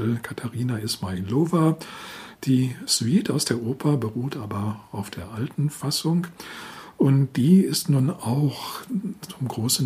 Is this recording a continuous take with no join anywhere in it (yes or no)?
no